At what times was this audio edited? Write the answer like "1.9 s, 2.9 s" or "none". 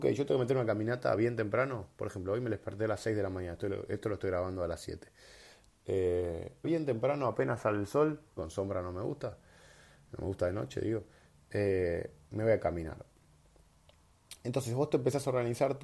6.6 s, 8.4 s